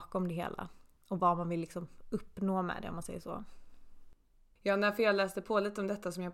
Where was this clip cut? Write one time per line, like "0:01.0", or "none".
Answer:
0:04.6